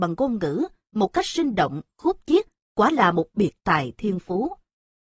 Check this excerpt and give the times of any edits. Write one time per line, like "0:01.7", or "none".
none